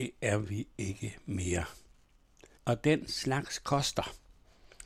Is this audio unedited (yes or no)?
no